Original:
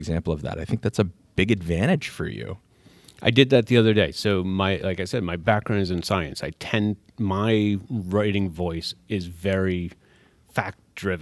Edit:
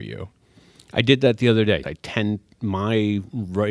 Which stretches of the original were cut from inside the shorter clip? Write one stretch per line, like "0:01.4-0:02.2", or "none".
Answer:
0:04.1-0:06.4

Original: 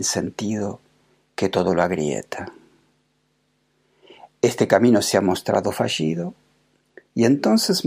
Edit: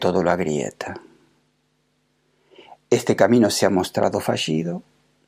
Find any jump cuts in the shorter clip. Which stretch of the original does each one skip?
none

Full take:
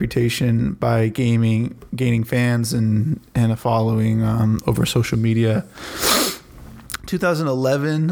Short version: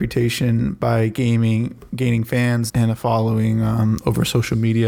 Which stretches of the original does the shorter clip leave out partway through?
0:02.7-0:03.3

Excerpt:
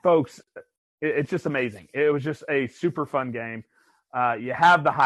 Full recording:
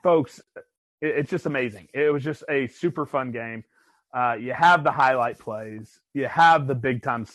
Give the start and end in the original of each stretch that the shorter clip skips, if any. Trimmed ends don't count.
none

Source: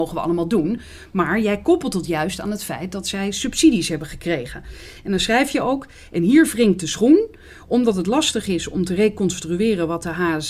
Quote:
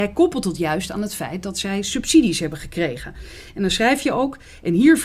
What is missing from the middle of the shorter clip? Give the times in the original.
none

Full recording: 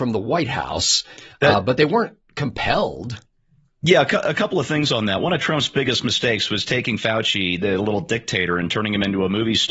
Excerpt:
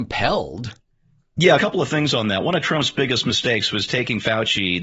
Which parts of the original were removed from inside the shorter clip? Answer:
0:04.0-0:04.3

